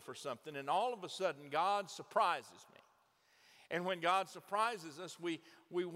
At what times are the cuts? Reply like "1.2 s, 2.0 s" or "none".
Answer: none

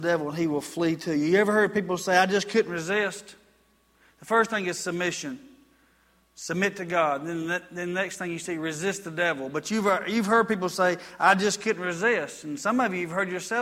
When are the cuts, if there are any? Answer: none

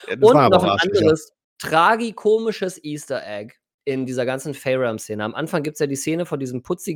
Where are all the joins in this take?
none

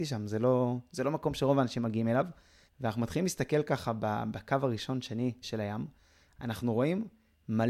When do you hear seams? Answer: 2.7 s, 5.4 s

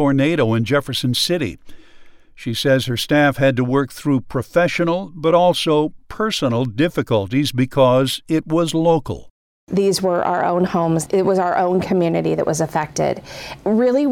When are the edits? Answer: none

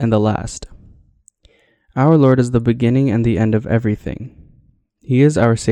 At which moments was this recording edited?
none

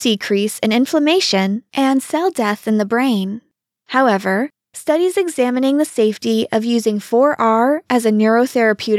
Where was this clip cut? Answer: none

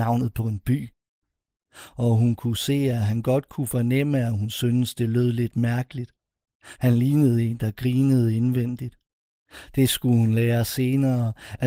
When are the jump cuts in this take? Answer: none

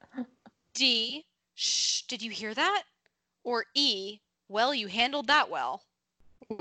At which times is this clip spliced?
none

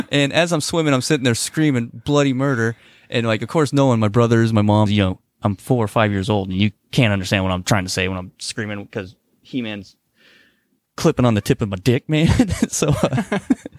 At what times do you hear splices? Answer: 4.9 s

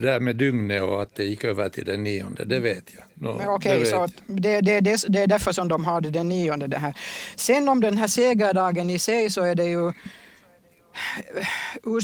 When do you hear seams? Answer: 3.1 s

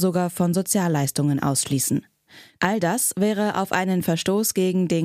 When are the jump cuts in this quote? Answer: 2.6 s

